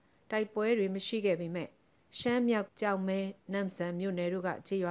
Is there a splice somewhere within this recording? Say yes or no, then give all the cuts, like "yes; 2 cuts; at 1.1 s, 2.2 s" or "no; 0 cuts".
yes; 1 cut; at 2.7 s